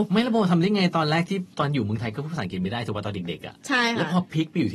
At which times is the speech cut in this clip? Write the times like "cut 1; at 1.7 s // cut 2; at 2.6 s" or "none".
cut 1; at 1.5 s